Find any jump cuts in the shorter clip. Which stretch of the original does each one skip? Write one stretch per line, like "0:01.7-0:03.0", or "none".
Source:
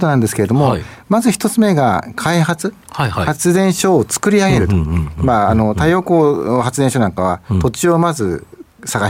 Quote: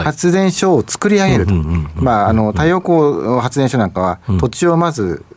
none